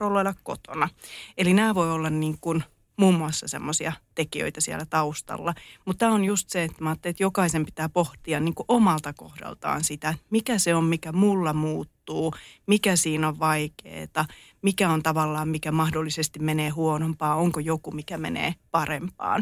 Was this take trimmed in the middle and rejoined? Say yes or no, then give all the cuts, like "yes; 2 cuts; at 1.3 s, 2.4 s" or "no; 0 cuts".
no; 0 cuts